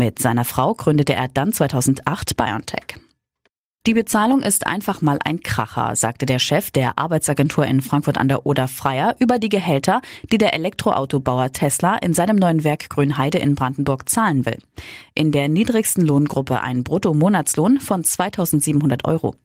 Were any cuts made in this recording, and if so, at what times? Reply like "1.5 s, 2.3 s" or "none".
3.8 s